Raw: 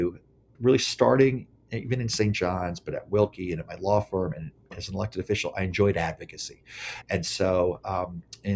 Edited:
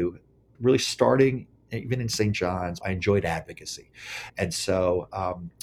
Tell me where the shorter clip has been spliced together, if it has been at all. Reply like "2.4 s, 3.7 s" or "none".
2.8 s